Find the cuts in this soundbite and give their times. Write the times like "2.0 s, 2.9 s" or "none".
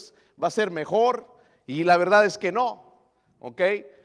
none